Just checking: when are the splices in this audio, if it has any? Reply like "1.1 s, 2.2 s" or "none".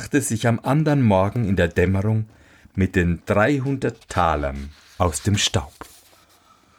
none

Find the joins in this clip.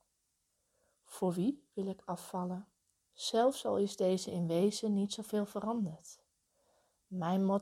3.1 s

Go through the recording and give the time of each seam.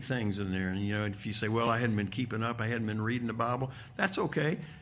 none

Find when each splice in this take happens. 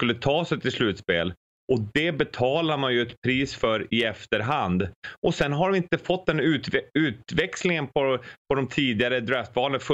none

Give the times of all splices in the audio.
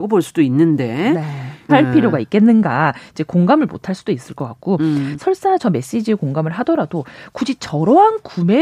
1.7 s, 5.1 s

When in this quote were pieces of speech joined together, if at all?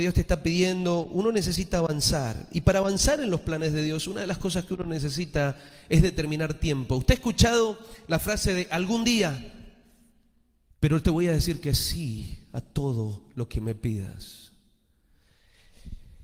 10.7 s

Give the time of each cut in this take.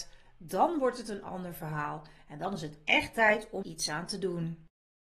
3.6 s

